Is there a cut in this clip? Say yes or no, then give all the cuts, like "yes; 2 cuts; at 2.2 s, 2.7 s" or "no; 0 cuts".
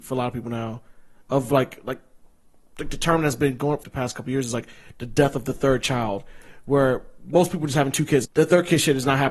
yes; 2 cuts; at 3.8 s, 8.2 s